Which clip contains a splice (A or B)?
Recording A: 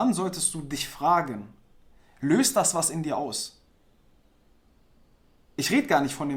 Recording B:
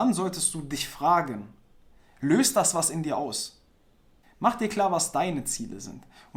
B